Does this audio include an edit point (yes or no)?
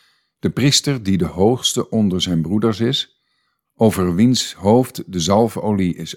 no